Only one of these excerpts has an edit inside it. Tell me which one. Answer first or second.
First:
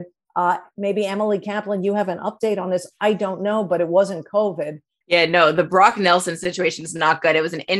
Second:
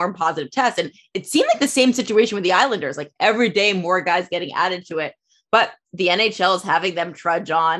first